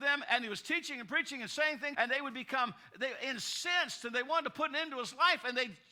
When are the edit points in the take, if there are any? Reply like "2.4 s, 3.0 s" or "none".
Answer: 1.9 s